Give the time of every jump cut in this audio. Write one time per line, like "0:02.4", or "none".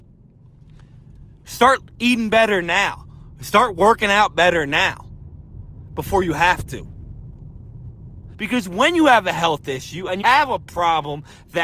0:08.3
0:10.2